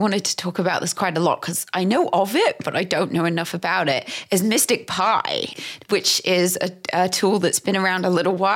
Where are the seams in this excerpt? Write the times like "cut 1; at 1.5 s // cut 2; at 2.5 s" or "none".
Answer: none